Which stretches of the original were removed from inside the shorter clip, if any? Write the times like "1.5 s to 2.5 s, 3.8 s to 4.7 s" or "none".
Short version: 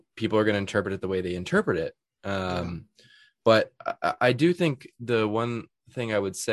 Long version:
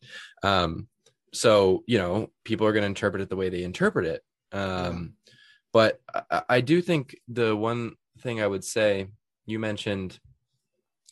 none

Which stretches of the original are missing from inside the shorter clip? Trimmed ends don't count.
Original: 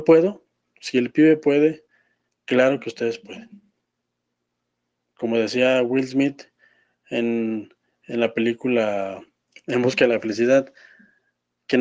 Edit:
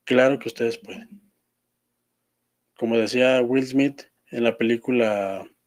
6.6 s to 7.9 s

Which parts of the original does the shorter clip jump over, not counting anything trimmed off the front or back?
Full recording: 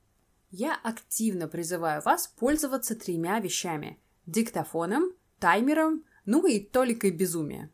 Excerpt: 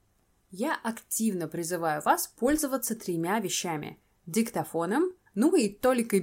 5.3 s to 6.2 s

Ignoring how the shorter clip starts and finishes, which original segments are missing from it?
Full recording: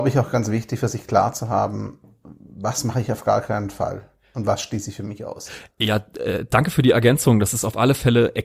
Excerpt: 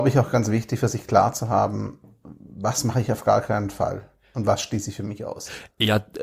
none

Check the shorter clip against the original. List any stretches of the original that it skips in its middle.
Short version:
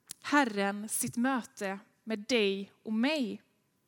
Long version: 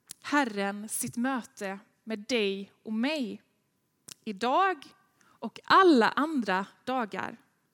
none

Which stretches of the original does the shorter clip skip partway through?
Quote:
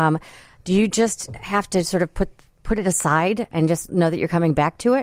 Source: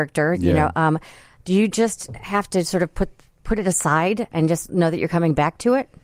none

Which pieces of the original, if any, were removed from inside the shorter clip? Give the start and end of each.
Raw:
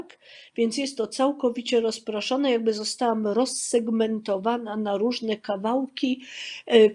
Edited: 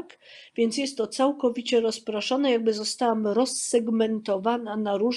none

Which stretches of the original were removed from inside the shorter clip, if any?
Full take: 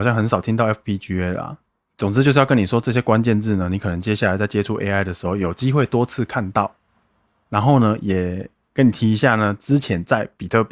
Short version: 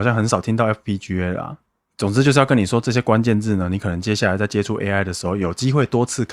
none

